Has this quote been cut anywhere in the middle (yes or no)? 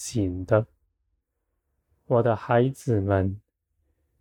no